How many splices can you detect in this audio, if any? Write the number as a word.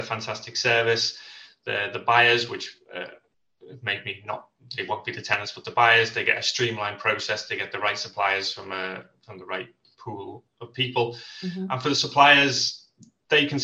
zero